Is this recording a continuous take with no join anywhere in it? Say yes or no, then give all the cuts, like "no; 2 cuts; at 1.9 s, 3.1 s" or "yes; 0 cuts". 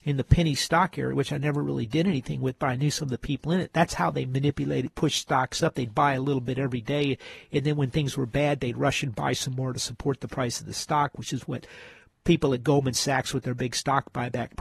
yes; 0 cuts